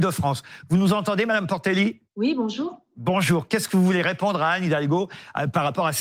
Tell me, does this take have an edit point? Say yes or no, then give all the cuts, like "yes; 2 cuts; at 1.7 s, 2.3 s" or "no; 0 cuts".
yes; 1 cut; at 2.1 s